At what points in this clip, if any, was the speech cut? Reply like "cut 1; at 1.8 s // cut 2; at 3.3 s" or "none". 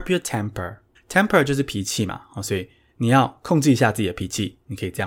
cut 1; at 1.0 s